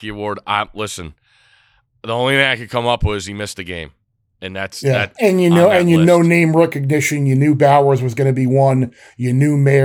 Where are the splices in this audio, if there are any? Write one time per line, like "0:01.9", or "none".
0:05.1